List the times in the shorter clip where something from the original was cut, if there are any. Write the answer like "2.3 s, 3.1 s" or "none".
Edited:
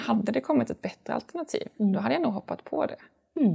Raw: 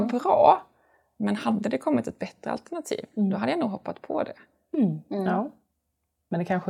none